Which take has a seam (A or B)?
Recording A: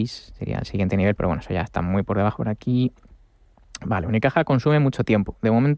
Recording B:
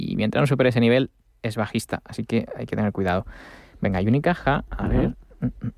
A